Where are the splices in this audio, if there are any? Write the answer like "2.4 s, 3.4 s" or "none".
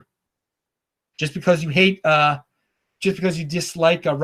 1.1 s